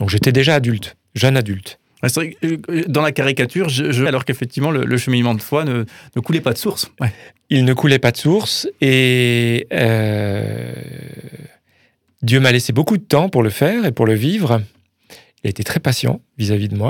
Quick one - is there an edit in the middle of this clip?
yes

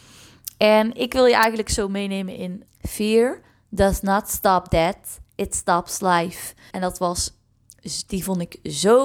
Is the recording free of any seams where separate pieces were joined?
no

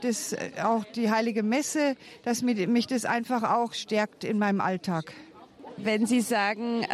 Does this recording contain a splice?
no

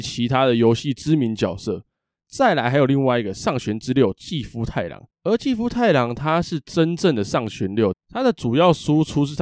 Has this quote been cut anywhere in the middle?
yes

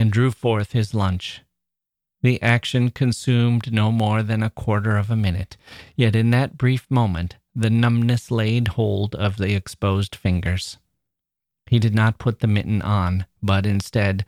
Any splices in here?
no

